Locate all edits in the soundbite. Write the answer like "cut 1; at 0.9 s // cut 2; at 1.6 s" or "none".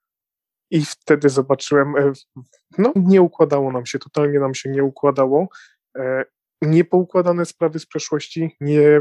cut 1; at 3.0 s // cut 2; at 6.5 s